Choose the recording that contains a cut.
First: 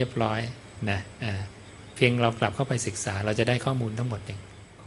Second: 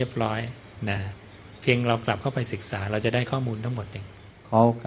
second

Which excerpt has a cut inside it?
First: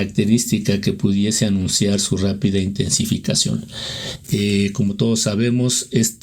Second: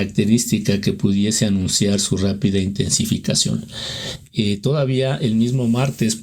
first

